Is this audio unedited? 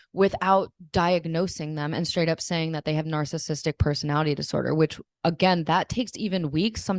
yes; 0 cuts

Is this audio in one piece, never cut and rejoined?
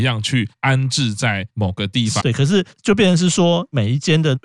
no; 1 cut; at 2.2 s

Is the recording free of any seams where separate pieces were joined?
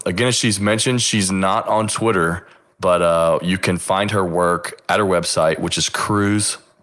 yes; 0 cuts

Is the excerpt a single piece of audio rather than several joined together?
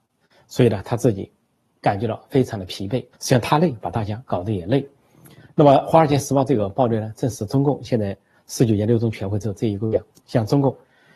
no; 2 cuts; at 3.1 s, 10.1 s

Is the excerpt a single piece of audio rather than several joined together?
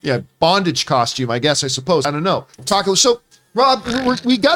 no; 1 cut; at 2.5 s

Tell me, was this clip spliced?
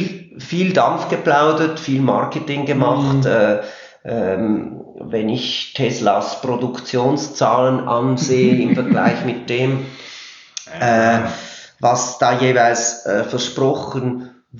no; 0 cuts

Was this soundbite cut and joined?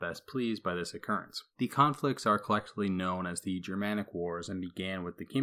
yes; 1 cut; at 1.5 s

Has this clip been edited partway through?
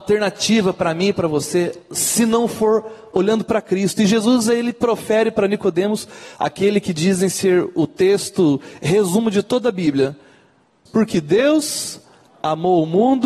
yes; 1 cut; at 10.9 s

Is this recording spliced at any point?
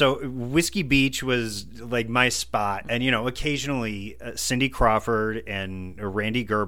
yes; 1 cut; at 2.8 s

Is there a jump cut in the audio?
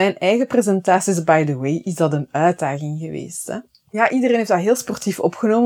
no; 0 cuts

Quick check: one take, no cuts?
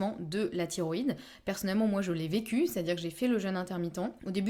yes; 0 cuts

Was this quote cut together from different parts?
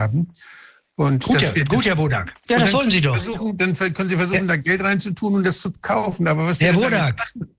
yes; 1 cut; at 2.4 s

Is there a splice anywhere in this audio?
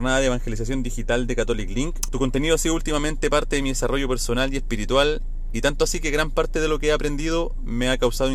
yes; 1 cut; at 2.1 s

